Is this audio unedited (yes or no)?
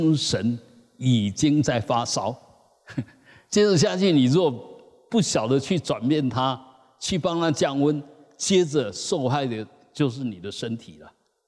yes